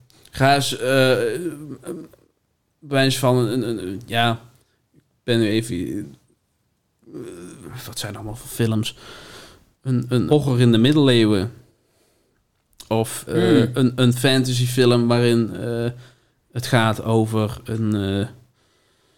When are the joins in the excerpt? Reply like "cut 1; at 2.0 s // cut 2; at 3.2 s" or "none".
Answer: cut 1; at 10.3 s // cut 2; at 13.3 s